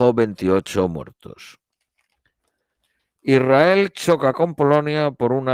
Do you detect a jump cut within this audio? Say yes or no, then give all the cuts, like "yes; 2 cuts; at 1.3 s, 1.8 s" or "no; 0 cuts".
no; 0 cuts